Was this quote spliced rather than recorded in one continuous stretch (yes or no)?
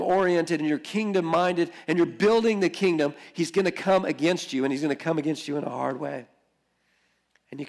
no